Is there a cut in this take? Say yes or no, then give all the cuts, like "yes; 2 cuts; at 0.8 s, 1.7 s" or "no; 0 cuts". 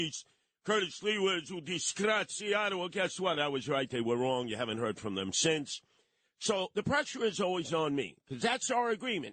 no; 0 cuts